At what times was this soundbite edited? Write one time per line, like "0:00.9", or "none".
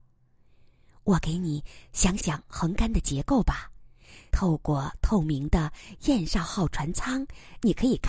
0:02.2
0:04.3

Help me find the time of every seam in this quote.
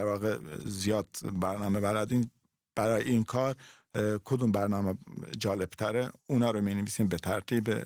0:06.2

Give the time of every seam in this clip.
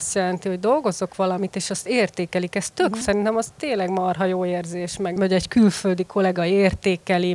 0:03.0
0:05.2

